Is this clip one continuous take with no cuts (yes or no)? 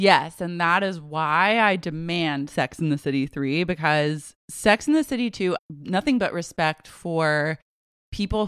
no